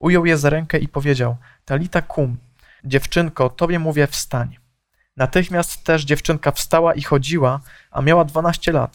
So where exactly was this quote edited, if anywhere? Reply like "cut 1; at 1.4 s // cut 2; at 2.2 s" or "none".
cut 1; at 2.8 s